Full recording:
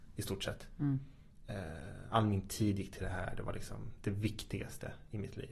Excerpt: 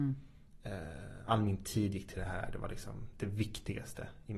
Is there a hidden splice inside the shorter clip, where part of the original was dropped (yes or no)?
no